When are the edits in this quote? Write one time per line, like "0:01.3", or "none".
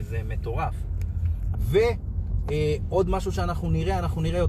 0:01.5